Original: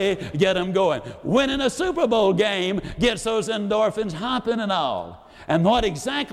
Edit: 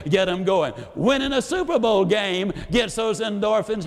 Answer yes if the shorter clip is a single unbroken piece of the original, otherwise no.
yes